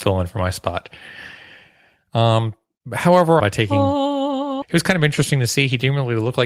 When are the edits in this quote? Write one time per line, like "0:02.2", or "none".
0:03.4
0:04.6